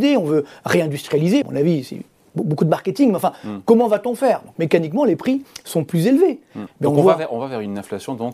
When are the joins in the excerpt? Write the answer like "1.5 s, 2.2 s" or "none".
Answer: 1.4 s, 6.7 s